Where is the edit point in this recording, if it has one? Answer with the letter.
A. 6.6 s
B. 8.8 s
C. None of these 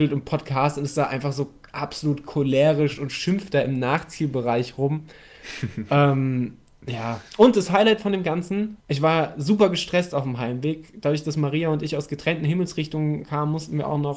B